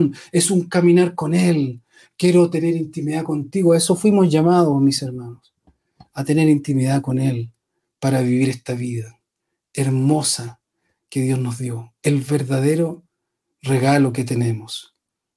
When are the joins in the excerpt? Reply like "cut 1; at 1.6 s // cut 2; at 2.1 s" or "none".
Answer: none

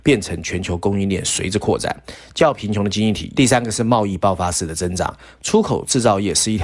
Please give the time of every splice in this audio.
cut 1; at 3.3 s

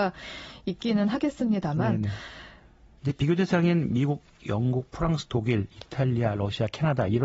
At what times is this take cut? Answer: cut 1; at 3.0 s

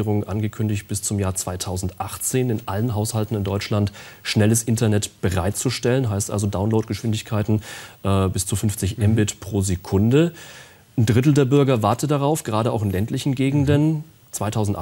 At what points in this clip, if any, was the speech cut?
none

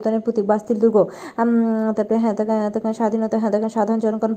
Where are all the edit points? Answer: none

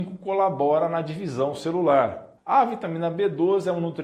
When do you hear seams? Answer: cut 1; at 2.4 s

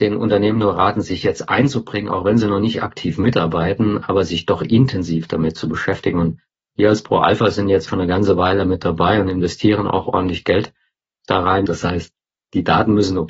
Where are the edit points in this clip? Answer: cut 1; at 7.9 s // cut 2; at 11.7 s

